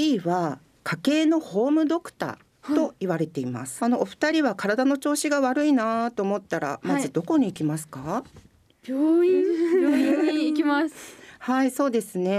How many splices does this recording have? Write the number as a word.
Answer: one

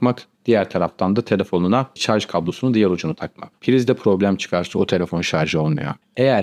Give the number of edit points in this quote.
one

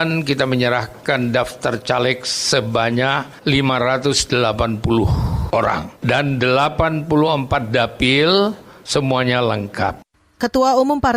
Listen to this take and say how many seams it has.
zero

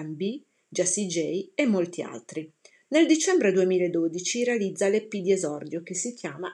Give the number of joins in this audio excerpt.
one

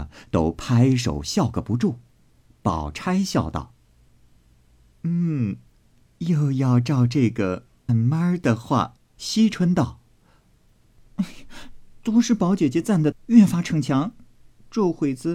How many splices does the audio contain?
three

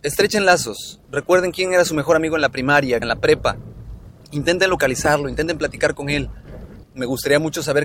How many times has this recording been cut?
two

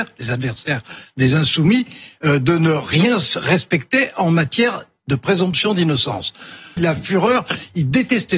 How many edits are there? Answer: one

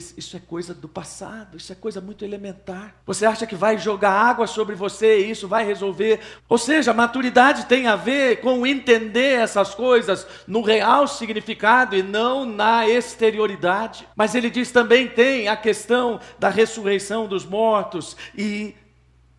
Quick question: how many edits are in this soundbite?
three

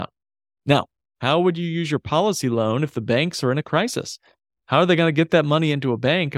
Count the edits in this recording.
one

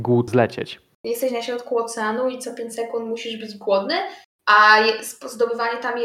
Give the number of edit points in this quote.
one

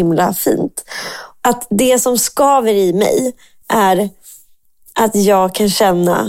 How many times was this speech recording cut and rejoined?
one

